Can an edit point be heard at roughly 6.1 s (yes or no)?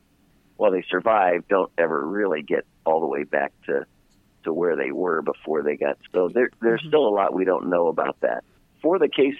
yes